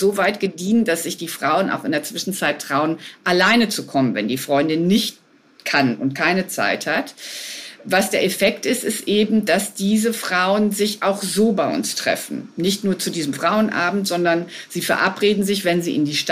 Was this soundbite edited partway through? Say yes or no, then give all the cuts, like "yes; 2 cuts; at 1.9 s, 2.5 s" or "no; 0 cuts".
no; 0 cuts